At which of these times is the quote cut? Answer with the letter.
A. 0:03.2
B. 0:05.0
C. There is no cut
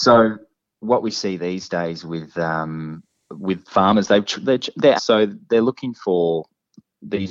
B